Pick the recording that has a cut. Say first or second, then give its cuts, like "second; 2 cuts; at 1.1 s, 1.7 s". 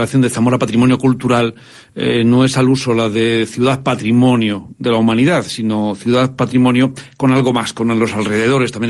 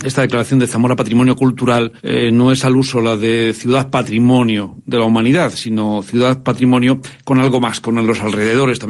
second; 1 cut; at 2.0 s